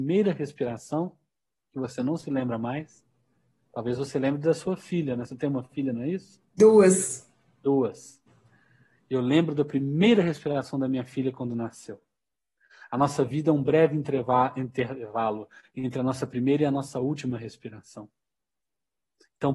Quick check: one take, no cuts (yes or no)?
yes